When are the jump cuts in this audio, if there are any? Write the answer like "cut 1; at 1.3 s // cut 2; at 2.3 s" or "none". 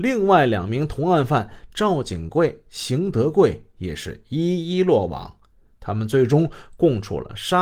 none

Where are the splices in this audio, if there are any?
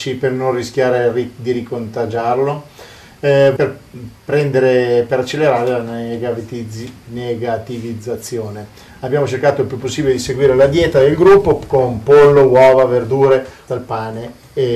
cut 1; at 3.6 s // cut 2; at 13.7 s

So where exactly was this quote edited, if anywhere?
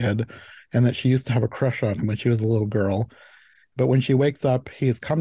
cut 1; at 3.7 s

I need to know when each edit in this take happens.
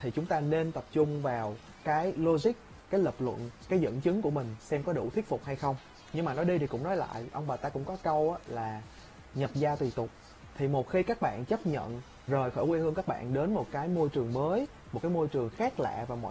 cut 1; at 12.3 s

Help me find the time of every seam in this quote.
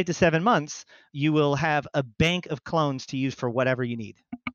cut 1; at 1.1 s

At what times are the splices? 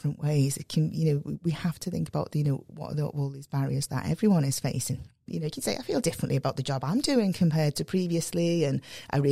cut 1; at 5.3 s // cut 2; at 7.7 s

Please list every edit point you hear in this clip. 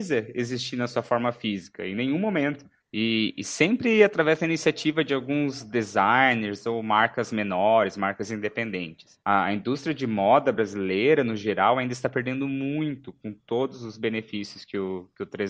cut 1; at 2.8 s

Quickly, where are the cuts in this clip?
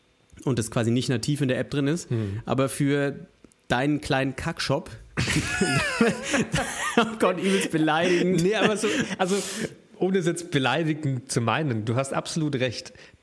none

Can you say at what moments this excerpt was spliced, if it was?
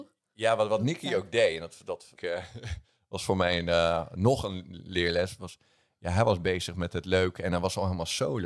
cut 1; at 2.2 s

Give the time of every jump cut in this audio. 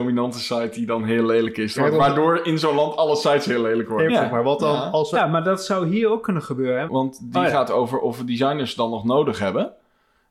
cut 1; at 1.8 s // cut 2; at 4.1 s // cut 3; at 6.9 s

